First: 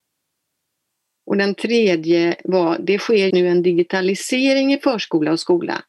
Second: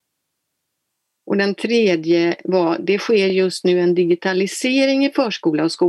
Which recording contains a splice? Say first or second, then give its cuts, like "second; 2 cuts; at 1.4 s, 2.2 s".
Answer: first; 1 cut; at 3.3 s